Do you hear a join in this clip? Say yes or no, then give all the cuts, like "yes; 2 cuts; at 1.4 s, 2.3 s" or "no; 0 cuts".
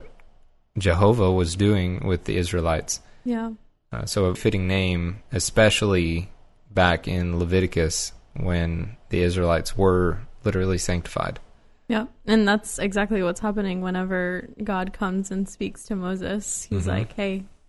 yes; 1 cut; at 4.4 s